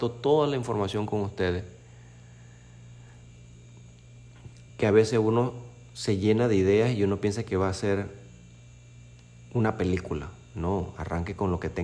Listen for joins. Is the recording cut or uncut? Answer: cut